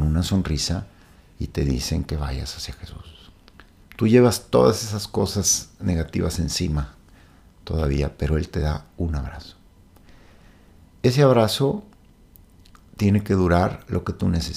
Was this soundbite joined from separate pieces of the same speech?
yes; 1 cut; at 3.8 s

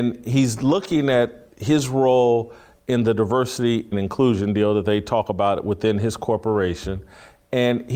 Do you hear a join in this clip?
yes; 1 cut; at 3.9 s

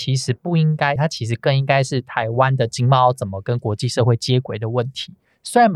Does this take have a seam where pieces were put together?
yes; 1 cut; at 1.0 s

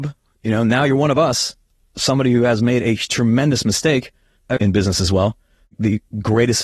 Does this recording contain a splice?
yes; 1 cut; at 4.6 s

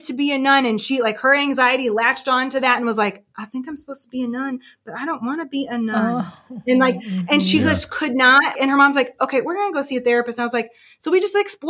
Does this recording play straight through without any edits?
no; 1 cut; at 8.5 s

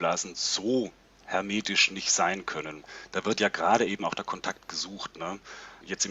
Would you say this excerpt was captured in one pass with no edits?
yes; 0 cuts

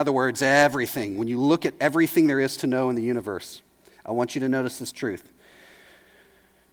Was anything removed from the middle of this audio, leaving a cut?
no; 0 cuts

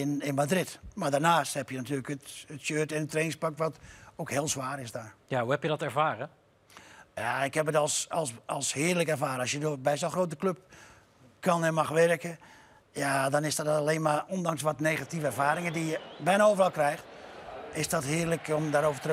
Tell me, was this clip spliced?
no; 0 cuts

